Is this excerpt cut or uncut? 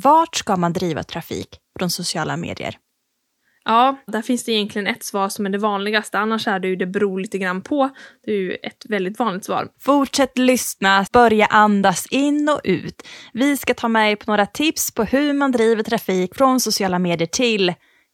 cut